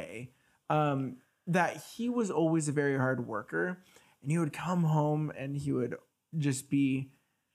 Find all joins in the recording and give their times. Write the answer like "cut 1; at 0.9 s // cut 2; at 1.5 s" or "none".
none